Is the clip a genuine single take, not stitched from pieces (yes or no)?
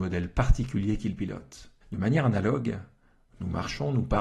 no